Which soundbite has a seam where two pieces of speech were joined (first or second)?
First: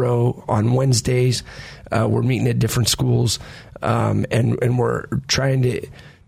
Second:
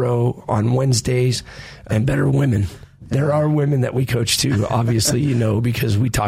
second